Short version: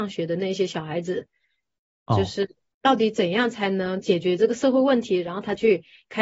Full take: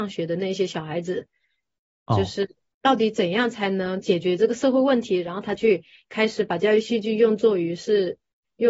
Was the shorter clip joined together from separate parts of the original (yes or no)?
no